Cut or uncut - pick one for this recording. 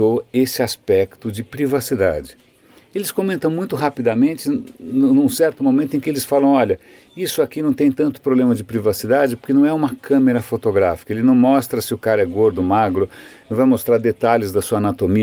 uncut